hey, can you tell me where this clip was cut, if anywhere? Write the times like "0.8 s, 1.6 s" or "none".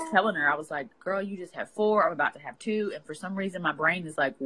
none